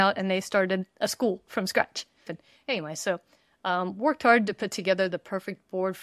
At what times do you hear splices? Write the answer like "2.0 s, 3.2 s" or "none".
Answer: 2.3 s